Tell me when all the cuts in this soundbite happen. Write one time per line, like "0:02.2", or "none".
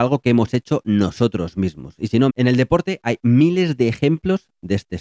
0:02.3